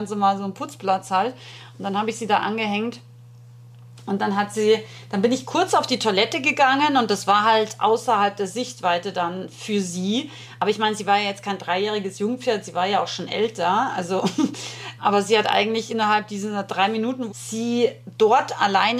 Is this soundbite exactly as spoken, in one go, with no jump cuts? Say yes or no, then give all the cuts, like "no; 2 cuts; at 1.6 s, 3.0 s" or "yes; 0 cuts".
no; 2 cuts; at 15.0 s, 17.3 s